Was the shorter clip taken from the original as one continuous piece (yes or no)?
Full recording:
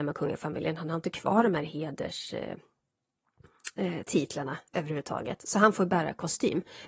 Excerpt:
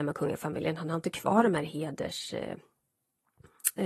yes